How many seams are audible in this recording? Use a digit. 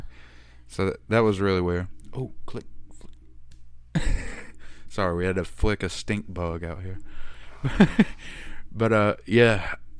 0